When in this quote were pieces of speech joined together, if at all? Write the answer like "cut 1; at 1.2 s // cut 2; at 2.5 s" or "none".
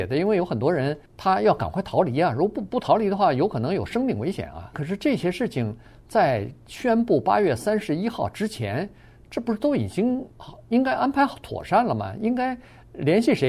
cut 1; at 1.1 s // cut 2; at 4.7 s // cut 3; at 10.3 s